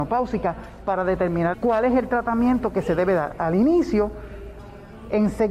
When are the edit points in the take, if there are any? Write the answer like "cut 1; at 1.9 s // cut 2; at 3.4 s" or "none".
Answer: cut 1; at 1.5 s